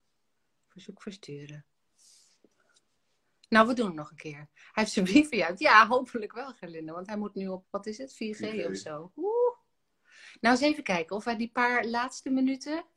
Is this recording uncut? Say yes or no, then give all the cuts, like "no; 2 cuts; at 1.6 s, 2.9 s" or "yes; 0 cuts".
no; 1 cut; at 7.6 s